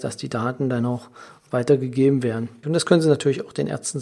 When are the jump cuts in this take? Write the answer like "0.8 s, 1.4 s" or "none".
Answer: 2.6 s